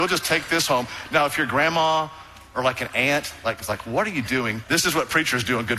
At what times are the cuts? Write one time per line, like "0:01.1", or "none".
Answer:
0:04.6